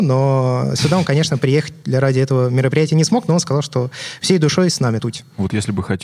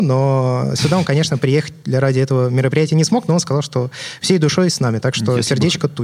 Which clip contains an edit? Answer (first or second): first